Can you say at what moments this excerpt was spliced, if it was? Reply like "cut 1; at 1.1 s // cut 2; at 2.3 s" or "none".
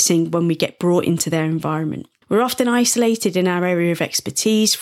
cut 1; at 2.2 s

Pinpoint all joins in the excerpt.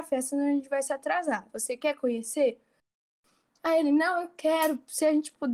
none

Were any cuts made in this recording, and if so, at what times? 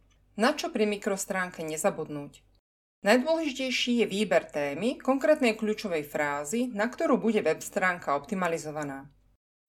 none

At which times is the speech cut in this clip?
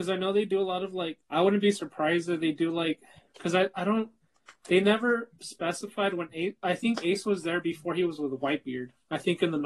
cut 1; at 1.2 s

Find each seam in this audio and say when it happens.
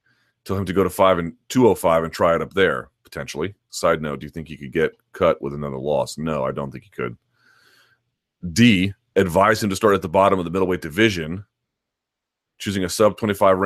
cut 1; at 3.7 s

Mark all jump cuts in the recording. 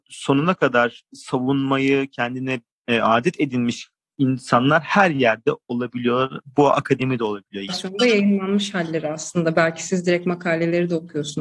cut 1; at 7.7 s

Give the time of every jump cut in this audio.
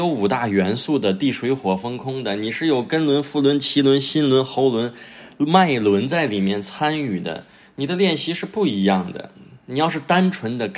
none

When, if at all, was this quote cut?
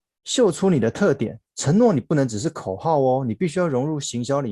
cut 1; at 1.5 s

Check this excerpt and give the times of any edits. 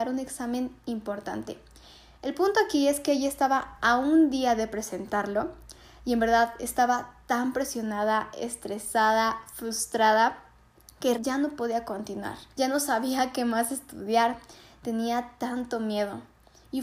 cut 1; at 11.1 s // cut 2; at 12.5 s

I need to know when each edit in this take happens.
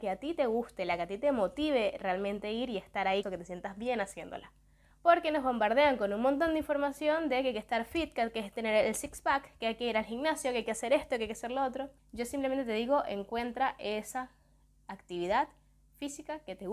cut 1; at 3.2 s // cut 2; at 4.9 s // cut 3; at 12.0 s

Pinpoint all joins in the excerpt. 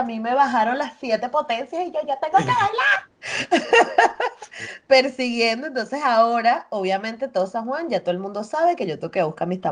none

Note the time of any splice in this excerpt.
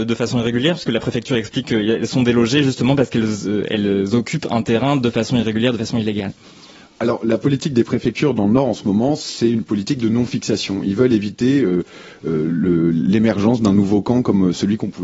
none

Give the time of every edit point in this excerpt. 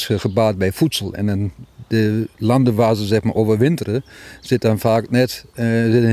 cut 1; at 2.3 s

